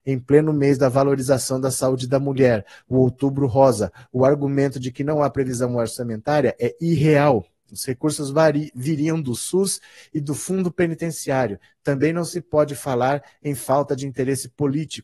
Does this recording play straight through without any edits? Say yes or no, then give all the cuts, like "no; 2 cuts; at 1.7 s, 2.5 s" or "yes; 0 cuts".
yes; 0 cuts